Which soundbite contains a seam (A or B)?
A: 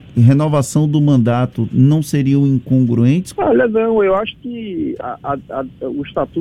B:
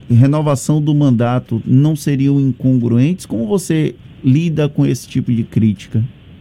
A